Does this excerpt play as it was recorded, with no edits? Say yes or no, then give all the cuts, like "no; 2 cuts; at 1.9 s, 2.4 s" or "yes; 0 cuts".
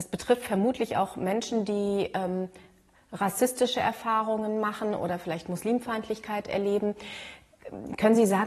yes; 0 cuts